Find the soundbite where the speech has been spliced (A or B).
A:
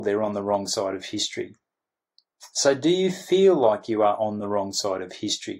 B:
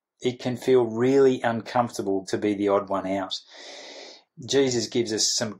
B